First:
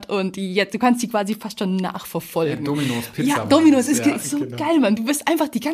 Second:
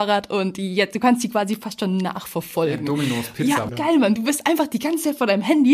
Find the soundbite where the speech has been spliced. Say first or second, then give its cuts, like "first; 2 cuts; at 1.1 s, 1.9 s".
second; 1 cut; at 3.7 s